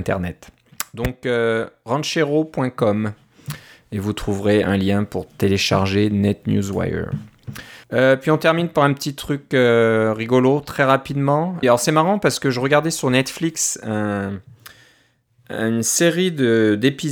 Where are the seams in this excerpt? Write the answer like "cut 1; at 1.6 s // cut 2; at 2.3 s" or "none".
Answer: cut 1; at 7.8 s // cut 2; at 11.6 s